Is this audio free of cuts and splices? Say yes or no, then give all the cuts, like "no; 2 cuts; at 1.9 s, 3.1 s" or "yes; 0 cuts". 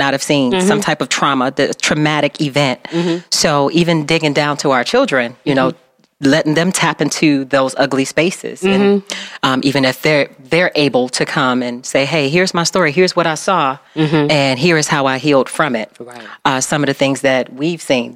yes; 0 cuts